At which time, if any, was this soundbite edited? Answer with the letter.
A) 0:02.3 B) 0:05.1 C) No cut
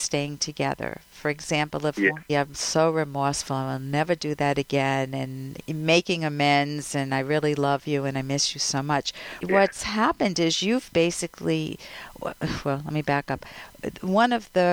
A